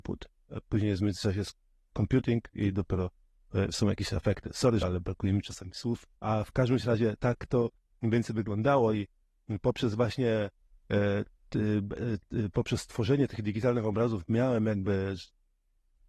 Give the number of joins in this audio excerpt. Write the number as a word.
two